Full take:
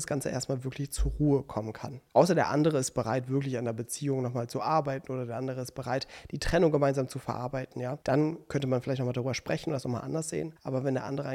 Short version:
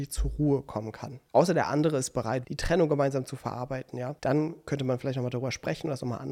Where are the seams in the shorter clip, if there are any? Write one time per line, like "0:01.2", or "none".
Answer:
0:02.4